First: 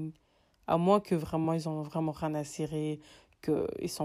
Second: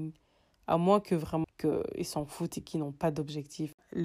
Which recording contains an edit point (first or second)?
second